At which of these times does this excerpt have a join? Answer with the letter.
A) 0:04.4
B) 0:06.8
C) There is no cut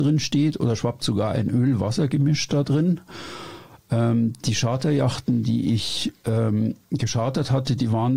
C